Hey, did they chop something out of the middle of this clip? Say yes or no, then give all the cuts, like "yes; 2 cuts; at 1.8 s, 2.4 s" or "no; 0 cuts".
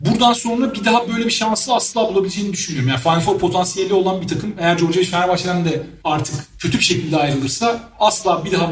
no; 0 cuts